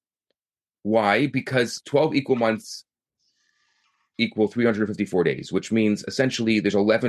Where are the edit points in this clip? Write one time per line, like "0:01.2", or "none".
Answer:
none